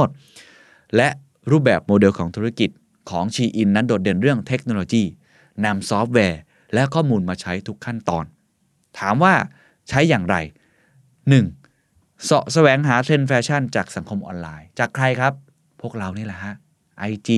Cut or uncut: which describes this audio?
uncut